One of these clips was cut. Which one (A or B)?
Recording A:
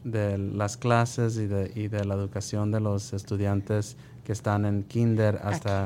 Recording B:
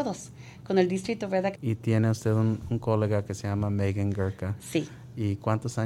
B